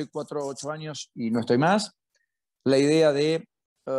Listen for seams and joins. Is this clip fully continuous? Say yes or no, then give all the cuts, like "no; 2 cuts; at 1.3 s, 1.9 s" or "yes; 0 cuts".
yes; 0 cuts